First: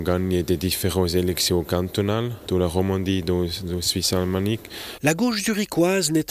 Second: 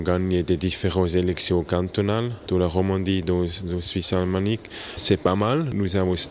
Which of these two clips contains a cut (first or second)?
first